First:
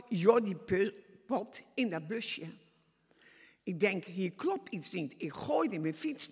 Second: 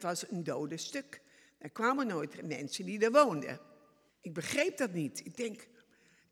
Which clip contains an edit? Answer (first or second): second